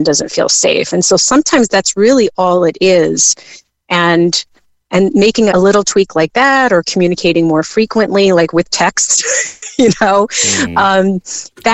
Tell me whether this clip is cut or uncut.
cut